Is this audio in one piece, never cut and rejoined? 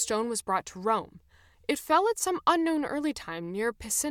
no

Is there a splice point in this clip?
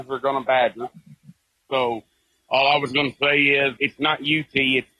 yes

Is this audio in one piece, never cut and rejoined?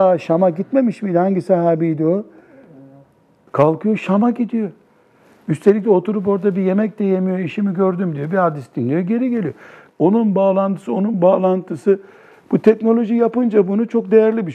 no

